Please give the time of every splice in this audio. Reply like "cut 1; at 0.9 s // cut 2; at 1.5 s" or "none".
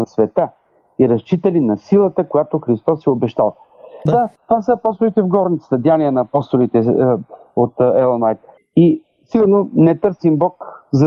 cut 1; at 4.1 s // cut 2; at 8.6 s